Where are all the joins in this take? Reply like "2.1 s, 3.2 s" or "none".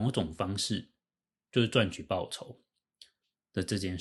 1.4 s